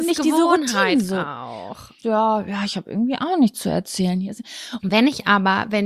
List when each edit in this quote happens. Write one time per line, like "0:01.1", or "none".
0:02.0
0:04.8